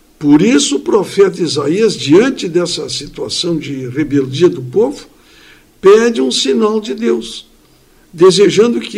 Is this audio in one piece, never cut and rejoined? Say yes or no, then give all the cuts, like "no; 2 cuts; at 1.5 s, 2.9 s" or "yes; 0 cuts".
yes; 0 cuts